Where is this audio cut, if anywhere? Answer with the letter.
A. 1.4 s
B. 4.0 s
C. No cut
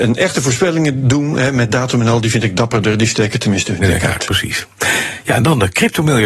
C